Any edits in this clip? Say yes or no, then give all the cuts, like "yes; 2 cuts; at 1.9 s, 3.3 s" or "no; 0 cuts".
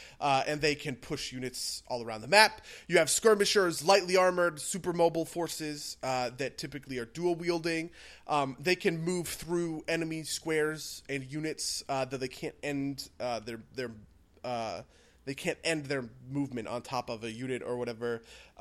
no; 0 cuts